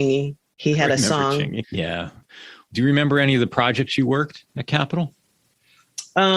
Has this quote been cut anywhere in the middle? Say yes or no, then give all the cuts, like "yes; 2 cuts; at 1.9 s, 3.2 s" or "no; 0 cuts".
yes; 1 cut; at 1.6 s